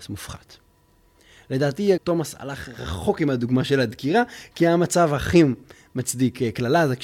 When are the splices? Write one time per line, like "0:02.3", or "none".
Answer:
0:02.0